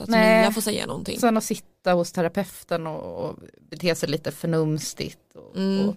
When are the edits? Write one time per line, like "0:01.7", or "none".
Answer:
none

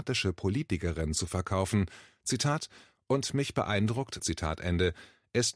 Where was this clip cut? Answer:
0:04.2

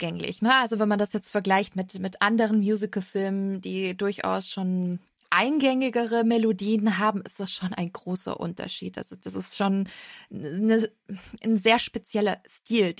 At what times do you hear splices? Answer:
none

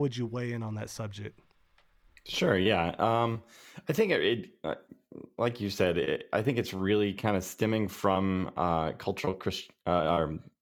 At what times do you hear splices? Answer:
none

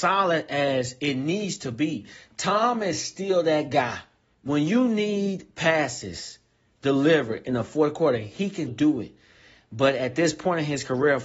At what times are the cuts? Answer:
0:08.7

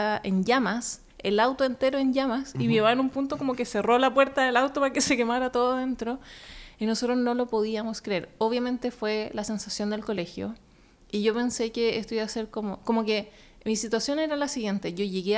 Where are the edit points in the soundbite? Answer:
none

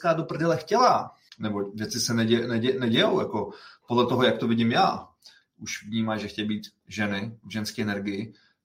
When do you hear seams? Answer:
0:01.3
0:05.4

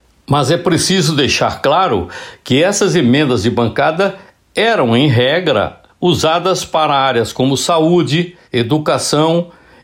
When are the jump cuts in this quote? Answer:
0:08.4

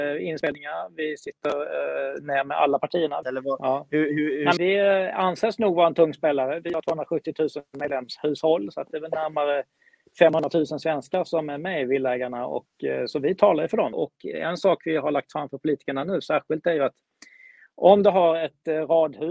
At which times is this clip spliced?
0:03.2
0:04.6
0:13.9

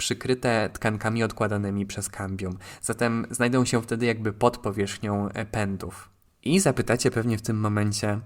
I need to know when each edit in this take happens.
none

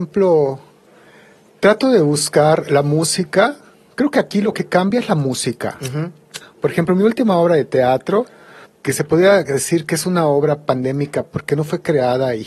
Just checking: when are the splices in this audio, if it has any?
0:06.4
0:08.6
0:11.2

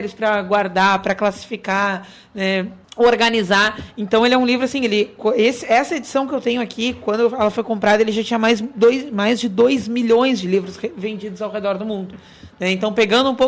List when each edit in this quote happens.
0:02.8

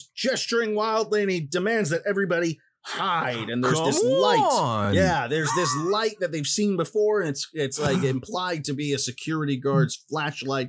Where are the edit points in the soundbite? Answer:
none

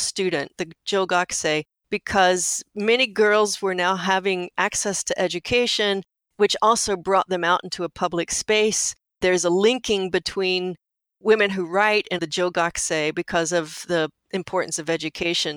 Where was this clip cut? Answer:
0:12.2

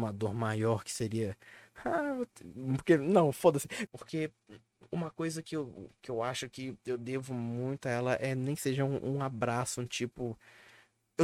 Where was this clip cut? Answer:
0:03.9

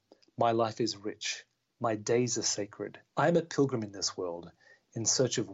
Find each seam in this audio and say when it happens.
0:03.1

